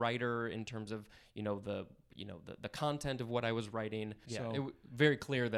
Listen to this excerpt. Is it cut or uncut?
cut